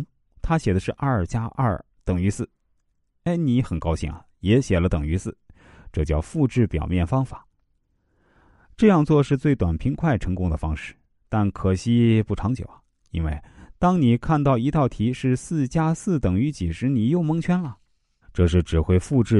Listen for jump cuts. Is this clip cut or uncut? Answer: cut